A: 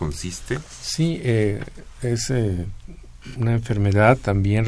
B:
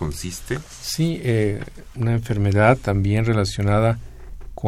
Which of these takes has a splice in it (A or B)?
B